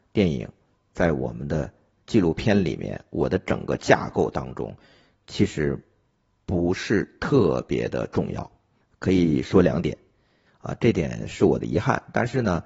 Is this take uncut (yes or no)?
no